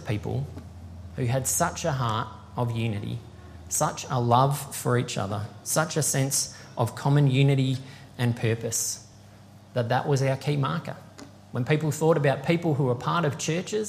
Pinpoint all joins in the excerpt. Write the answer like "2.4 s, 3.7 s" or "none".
none